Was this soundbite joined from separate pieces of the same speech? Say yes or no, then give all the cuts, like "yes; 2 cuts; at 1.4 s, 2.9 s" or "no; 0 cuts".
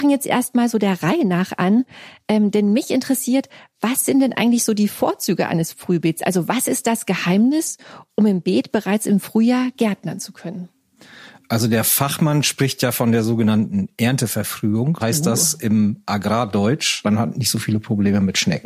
yes; 2 cuts; at 15.0 s, 17.0 s